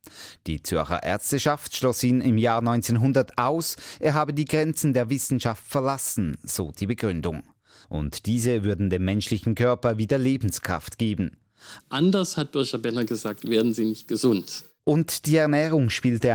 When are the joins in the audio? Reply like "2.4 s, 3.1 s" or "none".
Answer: 7.8 s, 11.8 s